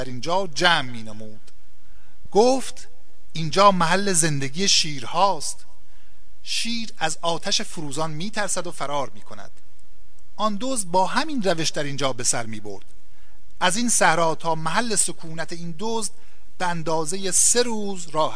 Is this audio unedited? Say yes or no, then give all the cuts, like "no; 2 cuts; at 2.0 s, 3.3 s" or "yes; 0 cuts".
no; 1 cut; at 2.3 s